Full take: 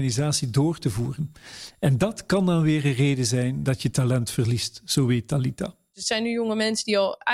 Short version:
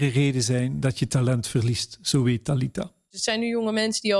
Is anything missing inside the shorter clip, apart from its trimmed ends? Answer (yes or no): no